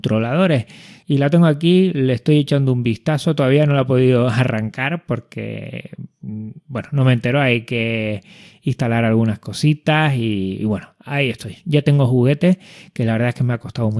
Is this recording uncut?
yes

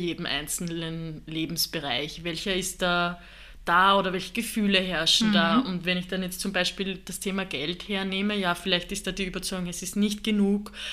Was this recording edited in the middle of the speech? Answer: no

